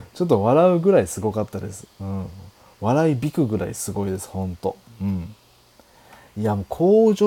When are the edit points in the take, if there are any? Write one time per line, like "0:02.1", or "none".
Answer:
none